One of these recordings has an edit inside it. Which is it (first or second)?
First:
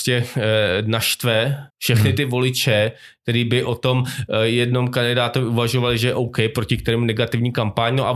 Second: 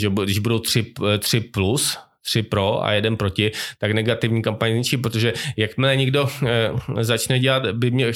first